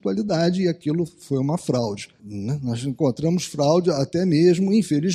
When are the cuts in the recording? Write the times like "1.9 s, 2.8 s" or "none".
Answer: 2.2 s